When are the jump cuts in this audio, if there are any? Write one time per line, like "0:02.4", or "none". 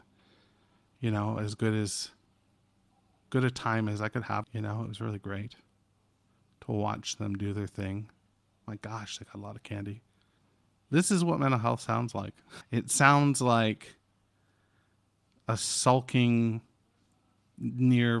0:04.4
0:12.6